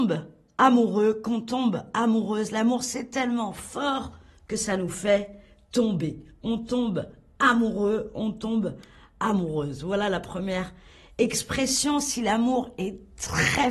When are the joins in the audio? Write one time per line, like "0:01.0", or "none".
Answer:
none